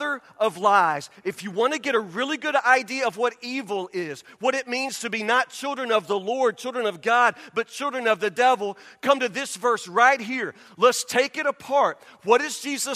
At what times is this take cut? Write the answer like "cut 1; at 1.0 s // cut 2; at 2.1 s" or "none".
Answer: none